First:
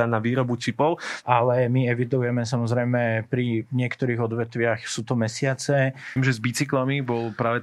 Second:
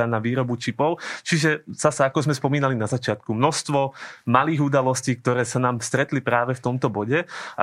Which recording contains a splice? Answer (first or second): first